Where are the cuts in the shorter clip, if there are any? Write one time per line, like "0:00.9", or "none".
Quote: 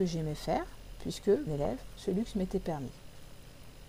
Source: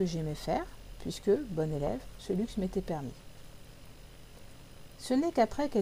0:01.5